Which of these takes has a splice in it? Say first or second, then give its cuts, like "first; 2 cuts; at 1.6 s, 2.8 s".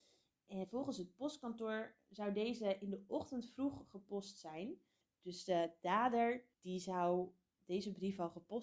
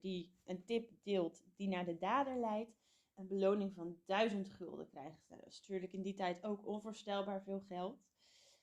first; 2 cuts; at 5.0 s, 6.5 s